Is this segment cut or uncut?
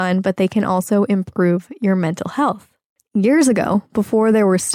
cut